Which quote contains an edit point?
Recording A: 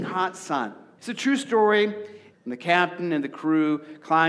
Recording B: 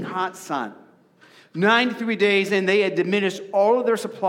A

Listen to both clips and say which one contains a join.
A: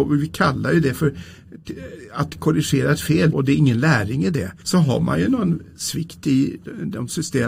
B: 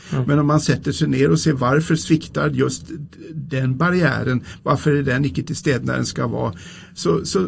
A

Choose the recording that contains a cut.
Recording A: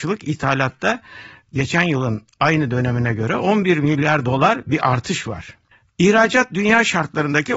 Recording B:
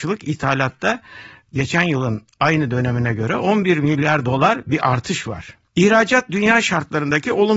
B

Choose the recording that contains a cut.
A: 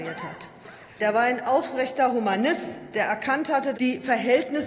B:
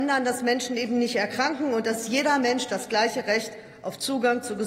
A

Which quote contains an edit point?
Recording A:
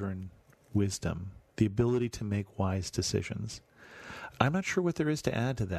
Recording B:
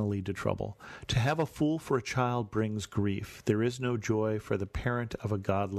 A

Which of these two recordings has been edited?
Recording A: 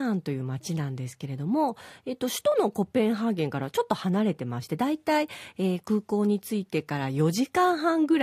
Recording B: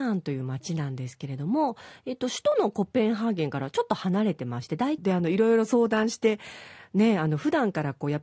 B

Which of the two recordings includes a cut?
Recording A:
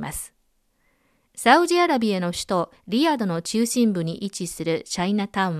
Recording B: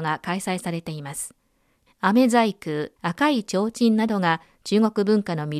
B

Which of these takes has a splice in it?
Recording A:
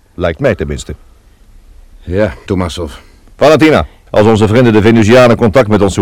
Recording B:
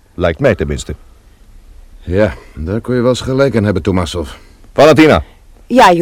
A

